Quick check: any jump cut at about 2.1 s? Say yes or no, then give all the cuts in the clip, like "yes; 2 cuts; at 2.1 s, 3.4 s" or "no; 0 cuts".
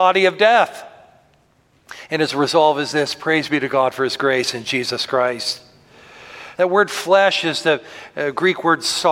no; 1 cut; at 6.5 s